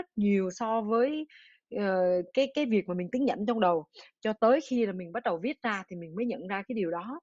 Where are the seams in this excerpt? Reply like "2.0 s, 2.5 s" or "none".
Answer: none